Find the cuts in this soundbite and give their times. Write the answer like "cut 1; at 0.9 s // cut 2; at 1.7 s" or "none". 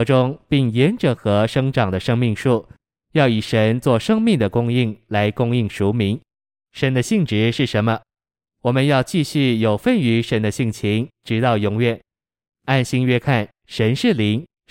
cut 1; at 8.4 s // cut 2; at 12.5 s